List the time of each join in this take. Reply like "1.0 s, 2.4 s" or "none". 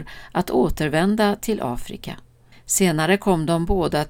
2.5 s